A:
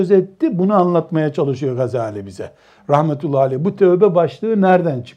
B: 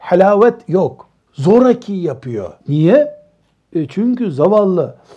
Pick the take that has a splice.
B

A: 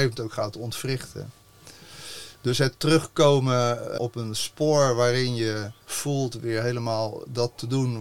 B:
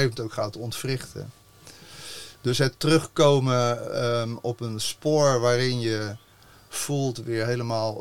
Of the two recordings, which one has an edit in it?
A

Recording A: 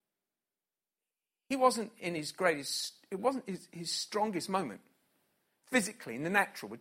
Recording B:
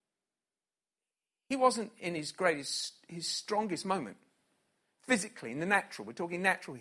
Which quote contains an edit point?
B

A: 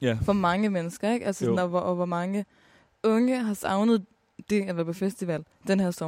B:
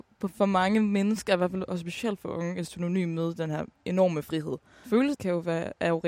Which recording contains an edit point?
B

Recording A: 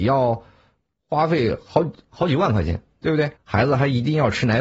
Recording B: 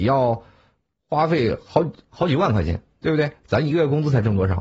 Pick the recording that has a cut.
A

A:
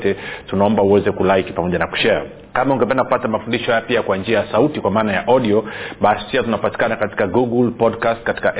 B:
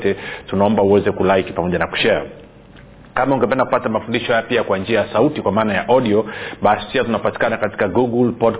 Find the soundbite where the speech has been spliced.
A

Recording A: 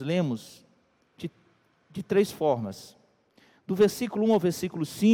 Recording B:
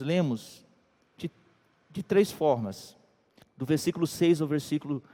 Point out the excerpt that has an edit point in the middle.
B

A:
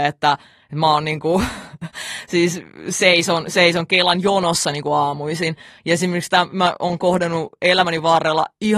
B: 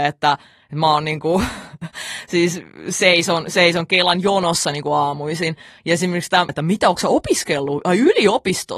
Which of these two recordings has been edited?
B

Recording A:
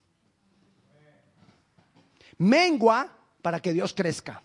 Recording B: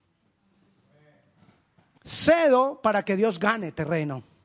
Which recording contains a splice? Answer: B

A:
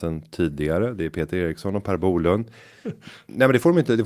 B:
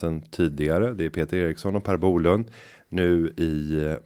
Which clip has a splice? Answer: A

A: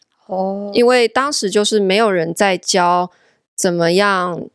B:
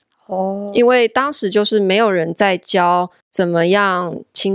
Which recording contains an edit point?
B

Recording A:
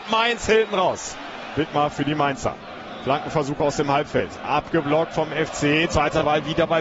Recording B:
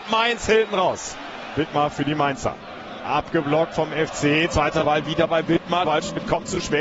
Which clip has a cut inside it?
B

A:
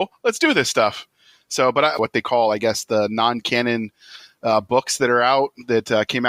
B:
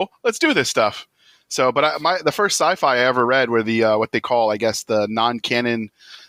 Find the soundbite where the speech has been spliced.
A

